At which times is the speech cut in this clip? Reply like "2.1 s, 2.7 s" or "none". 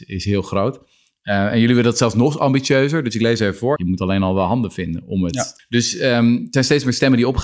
3.8 s, 5.6 s